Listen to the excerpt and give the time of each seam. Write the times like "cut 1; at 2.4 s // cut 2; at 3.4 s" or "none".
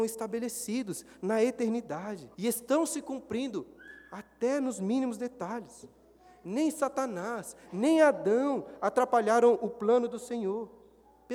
cut 1; at 2.3 s

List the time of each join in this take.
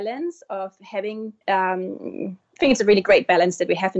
cut 1; at 1.4 s // cut 2; at 2.6 s

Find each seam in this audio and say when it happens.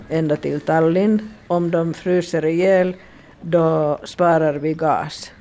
none

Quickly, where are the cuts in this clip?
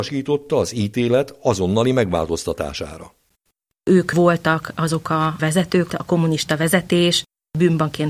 cut 1; at 3.8 s // cut 2; at 5.9 s

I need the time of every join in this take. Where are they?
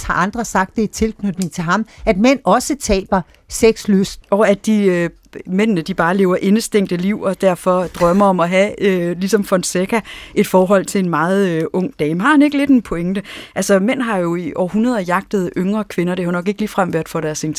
cut 1; at 4.2 s

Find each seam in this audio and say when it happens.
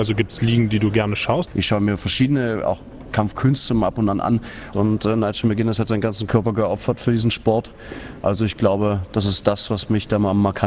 cut 1; at 1.5 s // cut 2; at 4.7 s

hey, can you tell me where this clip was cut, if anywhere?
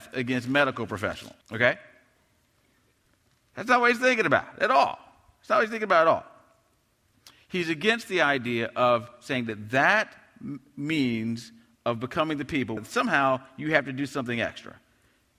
cut 1; at 1.4 s // cut 2; at 12.8 s

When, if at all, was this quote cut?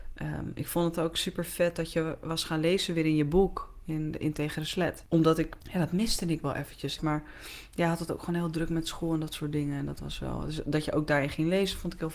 cut 1; at 7.0 s

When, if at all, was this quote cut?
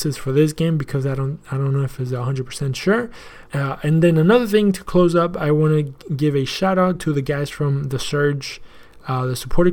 cut 1; at 3.5 s

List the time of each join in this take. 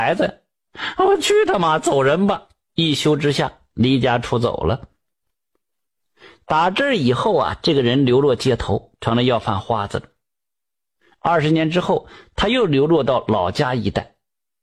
none

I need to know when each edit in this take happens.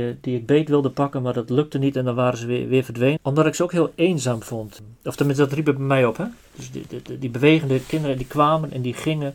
cut 1; at 3.2 s

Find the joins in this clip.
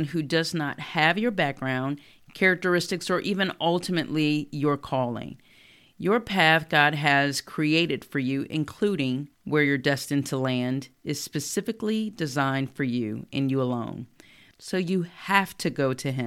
cut 1; at 9.3 s

